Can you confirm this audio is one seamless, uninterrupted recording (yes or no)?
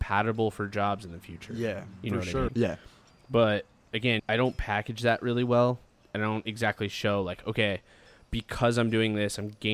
no